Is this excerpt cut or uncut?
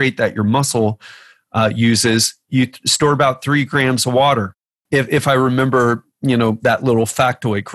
uncut